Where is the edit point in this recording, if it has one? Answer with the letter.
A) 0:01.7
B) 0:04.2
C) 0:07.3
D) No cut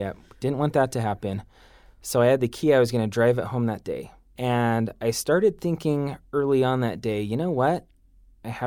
D